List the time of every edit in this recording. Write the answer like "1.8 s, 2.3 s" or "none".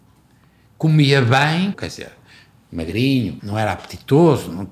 1.7 s, 3.4 s